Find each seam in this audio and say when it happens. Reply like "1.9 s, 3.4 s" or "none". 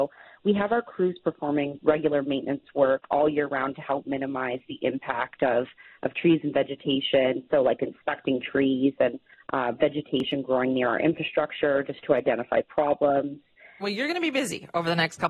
13.8 s